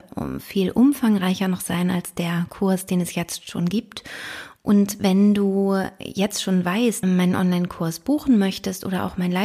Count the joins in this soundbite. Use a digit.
2